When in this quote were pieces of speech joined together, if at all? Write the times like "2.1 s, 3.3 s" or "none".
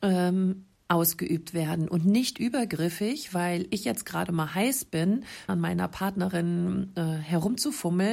5.5 s